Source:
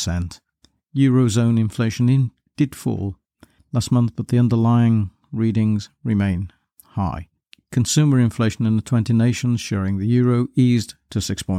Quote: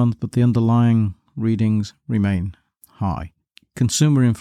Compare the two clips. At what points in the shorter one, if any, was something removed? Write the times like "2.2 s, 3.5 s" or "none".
none